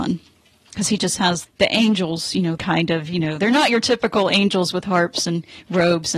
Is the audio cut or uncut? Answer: cut